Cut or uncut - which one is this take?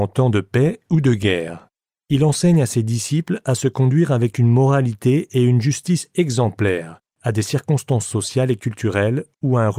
cut